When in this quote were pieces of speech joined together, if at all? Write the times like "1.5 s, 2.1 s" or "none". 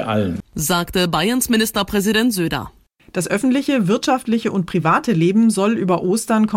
none